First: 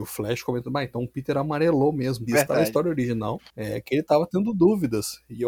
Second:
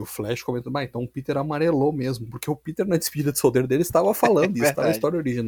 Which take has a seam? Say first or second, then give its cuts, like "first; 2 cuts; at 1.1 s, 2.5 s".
first; 2 cuts; at 2.3 s, 3.5 s